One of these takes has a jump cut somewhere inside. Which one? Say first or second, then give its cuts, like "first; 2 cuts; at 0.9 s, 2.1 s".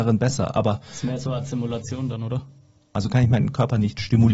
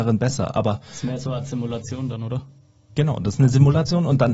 first; 1 cut; at 2.8 s